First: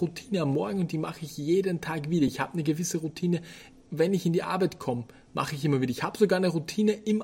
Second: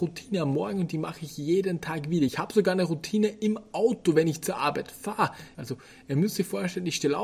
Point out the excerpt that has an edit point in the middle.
second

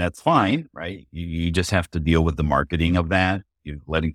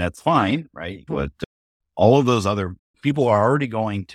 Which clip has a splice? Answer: second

